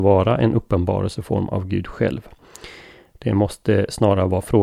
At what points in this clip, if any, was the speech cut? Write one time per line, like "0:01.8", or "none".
none